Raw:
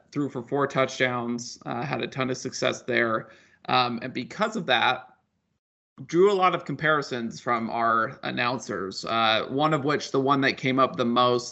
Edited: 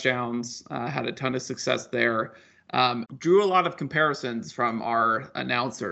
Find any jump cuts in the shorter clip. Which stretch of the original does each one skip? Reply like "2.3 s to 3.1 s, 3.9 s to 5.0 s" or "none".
4.0 s to 5.9 s